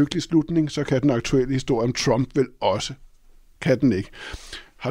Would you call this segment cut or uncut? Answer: uncut